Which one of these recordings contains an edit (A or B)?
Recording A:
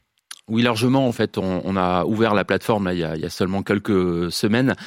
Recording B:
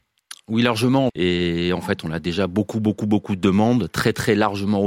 B